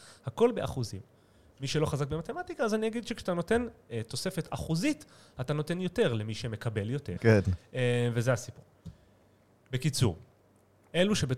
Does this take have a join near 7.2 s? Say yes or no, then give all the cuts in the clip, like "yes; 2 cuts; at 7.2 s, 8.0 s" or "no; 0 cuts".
yes; 1 cut; at 7.2 s